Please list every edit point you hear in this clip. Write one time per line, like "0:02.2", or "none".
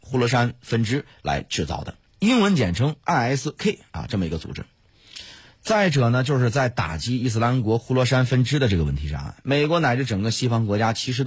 0:02.1
0:05.4